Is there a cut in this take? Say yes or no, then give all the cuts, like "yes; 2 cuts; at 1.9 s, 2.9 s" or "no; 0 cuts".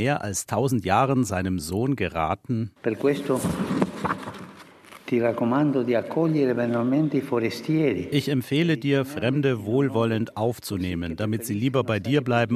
no; 0 cuts